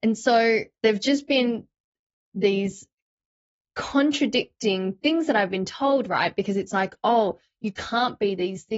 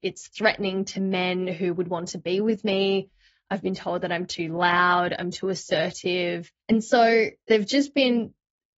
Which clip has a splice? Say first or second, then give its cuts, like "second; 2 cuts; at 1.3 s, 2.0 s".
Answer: second; 1 cut; at 6.6 s